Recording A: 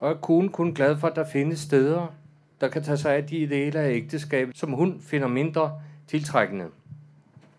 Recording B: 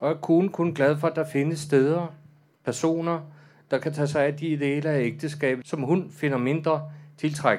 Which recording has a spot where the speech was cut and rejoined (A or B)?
A